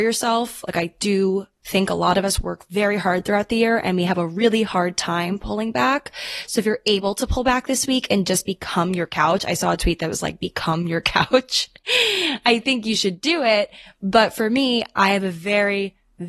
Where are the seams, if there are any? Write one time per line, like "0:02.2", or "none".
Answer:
none